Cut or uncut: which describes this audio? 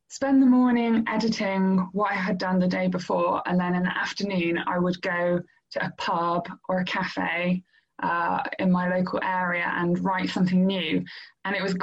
uncut